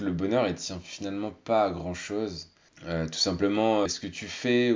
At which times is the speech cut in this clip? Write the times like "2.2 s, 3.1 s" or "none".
2.7 s, 3.9 s